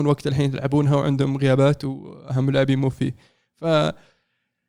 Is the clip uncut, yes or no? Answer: yes